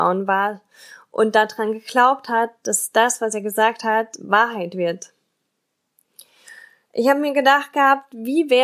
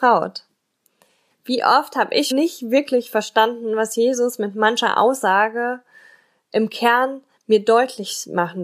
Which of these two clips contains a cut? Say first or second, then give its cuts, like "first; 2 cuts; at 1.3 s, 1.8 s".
second; 2 cuts; at 1.3 s, 2.3 s